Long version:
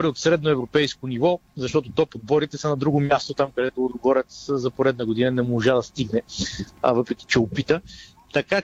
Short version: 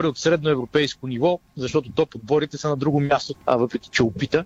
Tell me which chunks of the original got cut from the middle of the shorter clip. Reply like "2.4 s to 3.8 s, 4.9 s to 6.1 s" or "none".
3.3 s to 6.7 s